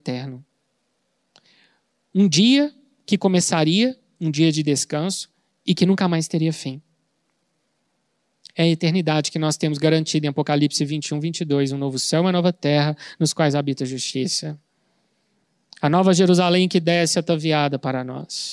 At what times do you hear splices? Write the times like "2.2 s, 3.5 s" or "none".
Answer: none